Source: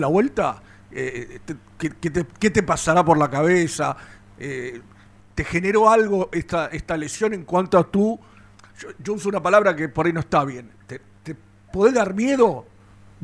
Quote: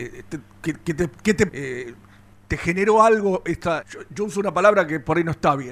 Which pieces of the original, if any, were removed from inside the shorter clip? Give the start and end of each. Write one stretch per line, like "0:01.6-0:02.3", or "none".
0:02.7-0:04.4
0:06.7-0:08.7